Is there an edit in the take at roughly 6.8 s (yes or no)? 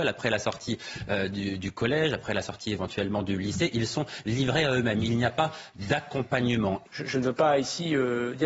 yes